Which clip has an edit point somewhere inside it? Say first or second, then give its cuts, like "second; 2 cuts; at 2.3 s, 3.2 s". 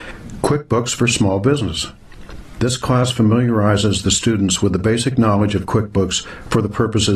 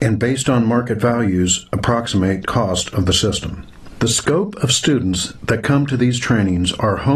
first; 1 cut; at 2.6 s